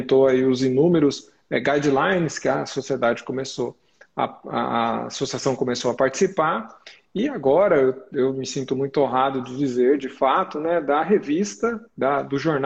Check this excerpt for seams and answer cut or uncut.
uncut